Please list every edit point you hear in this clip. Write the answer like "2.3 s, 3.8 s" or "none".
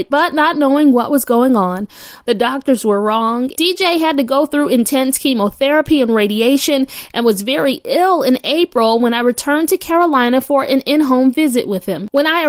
2.2 s, 3.5 s